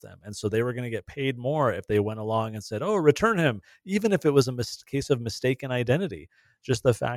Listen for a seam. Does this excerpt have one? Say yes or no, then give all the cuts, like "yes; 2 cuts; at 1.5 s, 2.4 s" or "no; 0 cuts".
no; 0 cuts